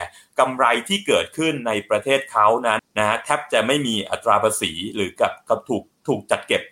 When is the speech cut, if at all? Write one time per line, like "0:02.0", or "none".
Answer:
0:02.8